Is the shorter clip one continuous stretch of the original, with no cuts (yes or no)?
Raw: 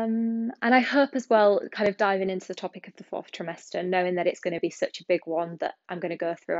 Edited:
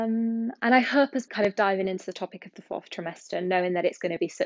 no